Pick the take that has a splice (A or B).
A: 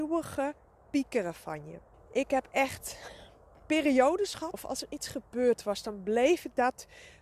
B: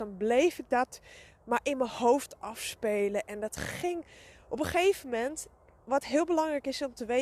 A